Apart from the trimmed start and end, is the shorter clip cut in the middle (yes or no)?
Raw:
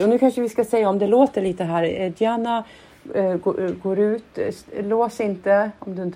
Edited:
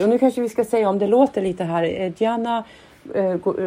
no